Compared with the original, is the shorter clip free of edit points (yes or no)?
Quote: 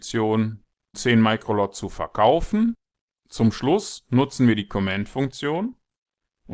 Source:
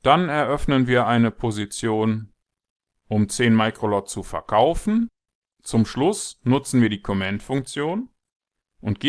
no